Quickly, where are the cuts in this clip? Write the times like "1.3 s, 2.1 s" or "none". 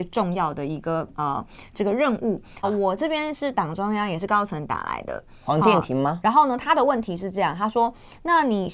2.6 s, 6.2 s